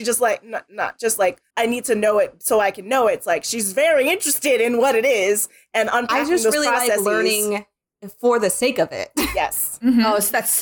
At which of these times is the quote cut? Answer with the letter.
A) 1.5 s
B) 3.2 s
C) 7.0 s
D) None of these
A